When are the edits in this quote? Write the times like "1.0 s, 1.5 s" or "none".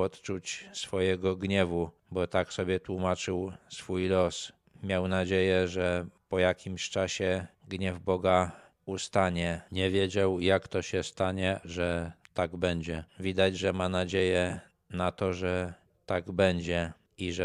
11.6 s, 13.1 s